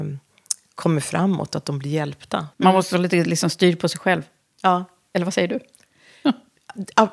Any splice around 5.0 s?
no; 1 cut; at 2.5 s

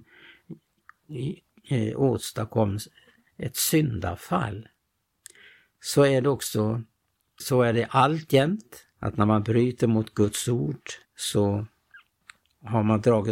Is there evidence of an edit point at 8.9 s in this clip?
yes; 3 cuts; at 7.4 s, 8.9 s, 11.0 s

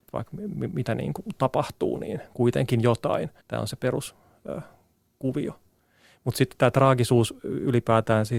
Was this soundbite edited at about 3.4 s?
yes; 1 cut; at 3.4 s

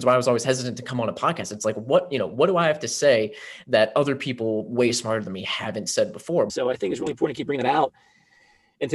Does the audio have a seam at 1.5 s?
no; 1 cut; at 6.5 s

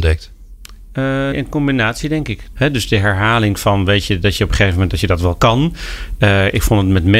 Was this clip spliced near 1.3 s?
yes; 2 cuts; at 1.3 s, 2.5 s

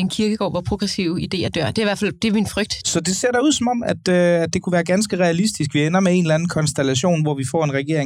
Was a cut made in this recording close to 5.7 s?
no; 1 cut; at 2.8 s

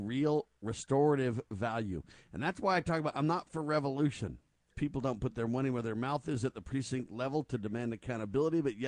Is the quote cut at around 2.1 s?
no; 1 cut; at 4.7 s

